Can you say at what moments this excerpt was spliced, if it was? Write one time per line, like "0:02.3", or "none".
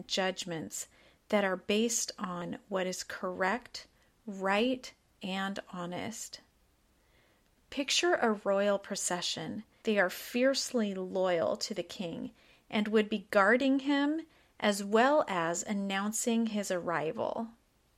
0:07.6
0:09.8